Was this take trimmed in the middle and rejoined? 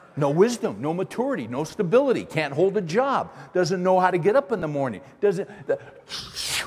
no; 0 cuts

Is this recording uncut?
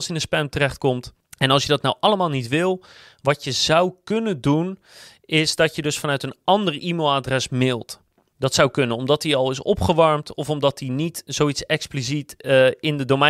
yes; 0 cuts

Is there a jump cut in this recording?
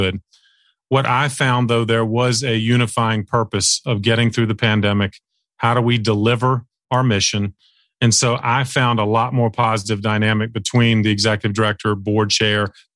no; 0 cuts

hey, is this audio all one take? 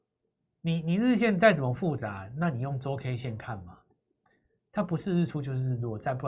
yes; 0 cuts

